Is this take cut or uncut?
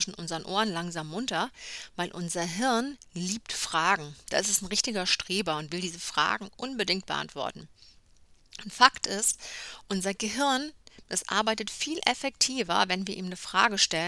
uncut